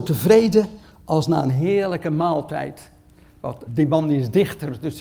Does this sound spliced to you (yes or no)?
yes